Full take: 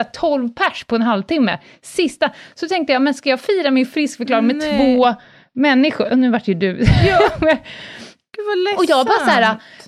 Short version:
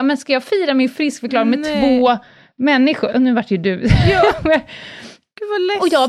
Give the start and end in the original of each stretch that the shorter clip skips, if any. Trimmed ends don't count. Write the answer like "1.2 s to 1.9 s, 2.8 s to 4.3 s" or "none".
none

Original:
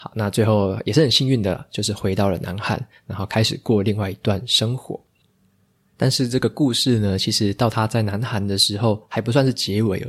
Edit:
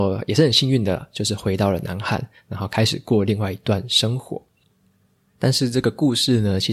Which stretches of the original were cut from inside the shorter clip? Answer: none

